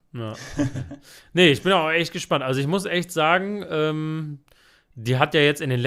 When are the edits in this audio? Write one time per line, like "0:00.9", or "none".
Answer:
none